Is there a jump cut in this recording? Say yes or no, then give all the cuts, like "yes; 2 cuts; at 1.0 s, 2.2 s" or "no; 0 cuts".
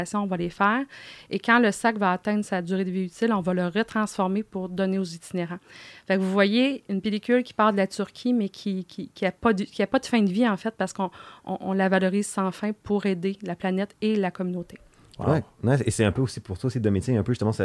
no; 0 cuts